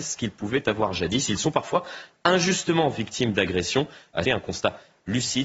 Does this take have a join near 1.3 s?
no; 1 cut; at 4.3 s

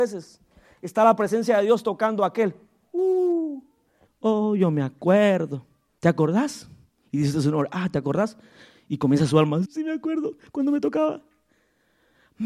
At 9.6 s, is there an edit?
yes; 3 cuts; at 4.1 s, 6.0 s, 9.6 s

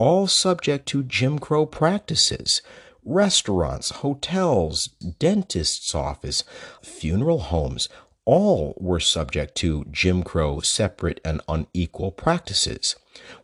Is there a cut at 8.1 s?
no; 2 cuts; at 5.0 s, 6.8 s

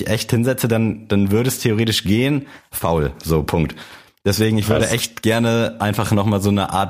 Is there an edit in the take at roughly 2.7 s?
yes; 1 cut; at 2.7 s

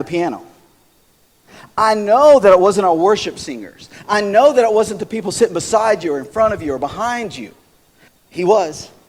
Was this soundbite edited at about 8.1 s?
yes; 1 cut; at 8.1 s

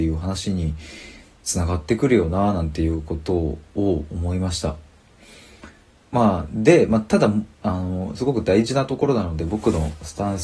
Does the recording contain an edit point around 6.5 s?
no; 0 cuts

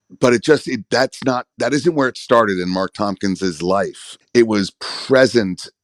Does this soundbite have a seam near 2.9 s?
no; 2 cuts; at 1.5 s, 4.2 s

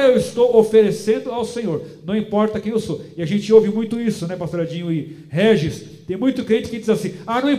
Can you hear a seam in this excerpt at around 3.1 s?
no; 0 cuts

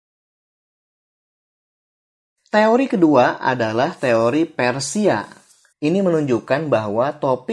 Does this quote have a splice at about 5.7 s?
yes; 1 cut; at 5.7 s

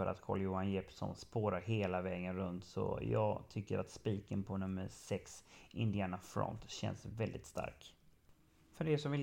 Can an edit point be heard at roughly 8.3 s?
no; 0 cuts

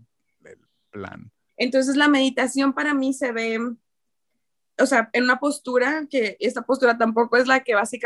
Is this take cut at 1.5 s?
yes; 1 cut; at 1.5 s

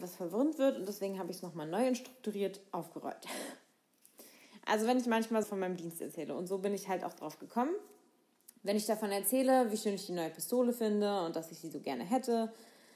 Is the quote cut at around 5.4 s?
yes; 1 cut; at 5.4 s

